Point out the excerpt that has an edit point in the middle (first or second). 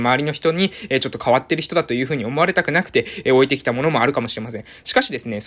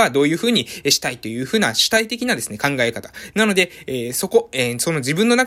second